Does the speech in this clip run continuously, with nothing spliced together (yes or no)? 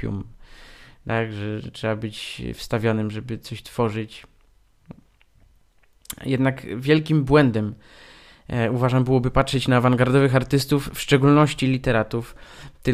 yes